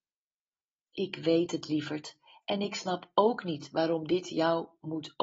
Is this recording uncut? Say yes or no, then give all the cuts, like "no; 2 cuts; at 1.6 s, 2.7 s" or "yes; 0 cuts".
yes; 0 cuts